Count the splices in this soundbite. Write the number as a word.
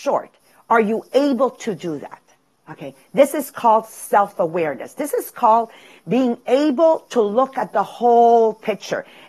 zero